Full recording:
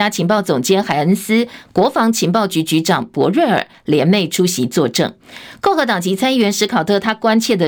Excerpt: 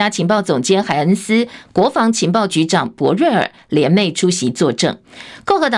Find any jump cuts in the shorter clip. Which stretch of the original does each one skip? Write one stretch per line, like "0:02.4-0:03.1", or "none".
0:02.5-0:02.7